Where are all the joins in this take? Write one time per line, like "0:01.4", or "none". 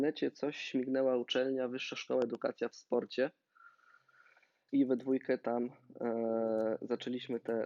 0:04.7